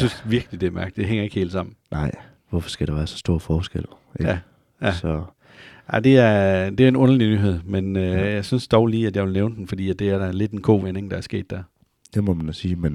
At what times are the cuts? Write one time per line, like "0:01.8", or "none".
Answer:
none